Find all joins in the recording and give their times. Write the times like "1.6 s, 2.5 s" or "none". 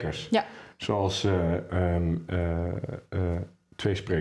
none